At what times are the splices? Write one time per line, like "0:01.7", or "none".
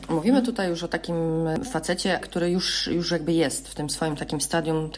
0:02.2